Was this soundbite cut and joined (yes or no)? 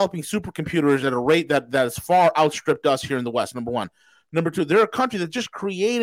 no